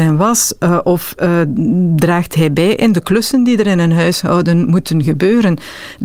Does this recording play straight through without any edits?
yes; 0 cuts

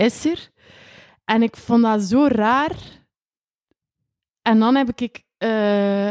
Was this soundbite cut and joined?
no; 0 cuts

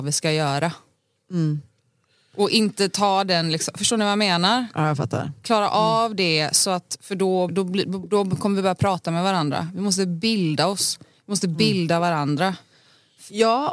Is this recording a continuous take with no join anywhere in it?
no; 1 cut; at 7.5 s

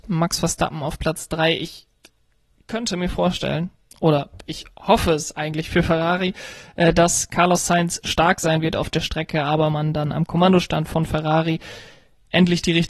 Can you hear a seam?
no; 0 cuts

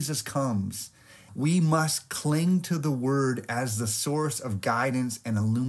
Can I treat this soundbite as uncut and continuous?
no; 1 cut; at 1.3 s

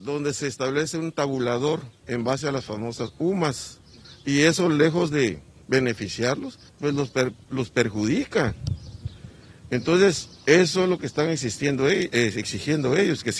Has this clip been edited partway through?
no; 0 cuts

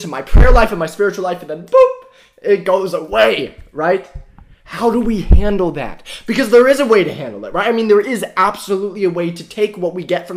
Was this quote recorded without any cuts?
yes; 0 cuts

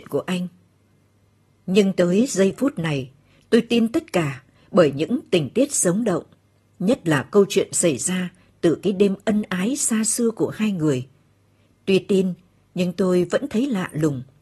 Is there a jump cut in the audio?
yes; 1 cut; at 11.7 s

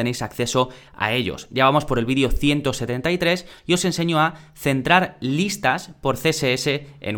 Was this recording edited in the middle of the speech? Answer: no; 0 cuts

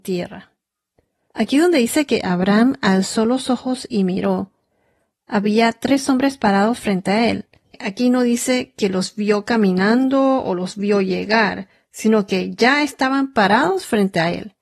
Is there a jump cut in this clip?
no; 0 cuts

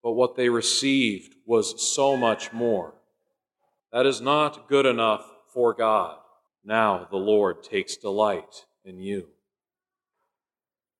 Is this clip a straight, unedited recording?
no; 2 cuts; at 3.8 s, 6.5 s

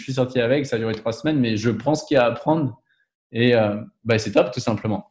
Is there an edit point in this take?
no; 0 cuts

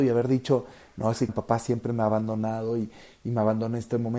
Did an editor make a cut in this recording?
yes; 1 cut; at 1.3 s

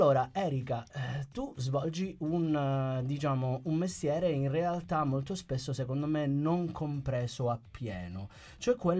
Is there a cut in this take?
no; 0 cuts

